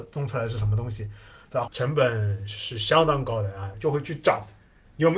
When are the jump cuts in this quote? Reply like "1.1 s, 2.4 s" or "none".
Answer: 1.7 s, 3.7 s